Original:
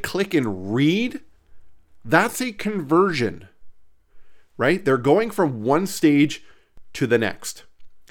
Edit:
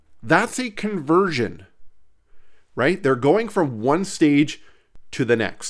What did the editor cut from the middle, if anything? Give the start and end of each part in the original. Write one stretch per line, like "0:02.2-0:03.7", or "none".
none